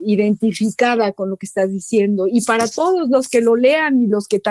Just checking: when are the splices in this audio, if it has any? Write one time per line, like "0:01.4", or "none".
none